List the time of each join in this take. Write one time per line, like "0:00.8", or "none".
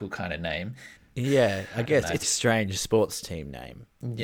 0:01.0
0:02.2